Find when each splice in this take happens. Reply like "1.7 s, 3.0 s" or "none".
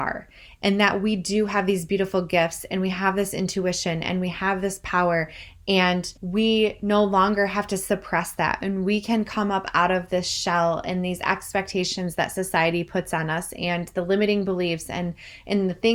6.2 s